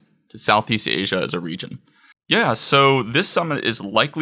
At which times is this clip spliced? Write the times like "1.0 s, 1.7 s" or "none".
2.1 s